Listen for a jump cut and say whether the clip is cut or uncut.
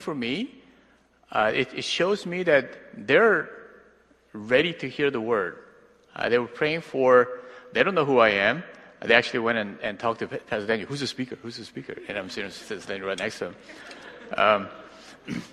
uncut